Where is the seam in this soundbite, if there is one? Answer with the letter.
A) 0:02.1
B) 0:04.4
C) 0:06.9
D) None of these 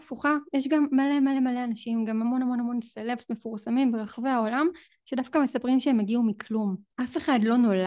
C